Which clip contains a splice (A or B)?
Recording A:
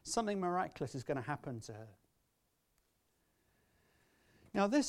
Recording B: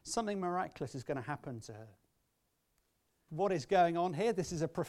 B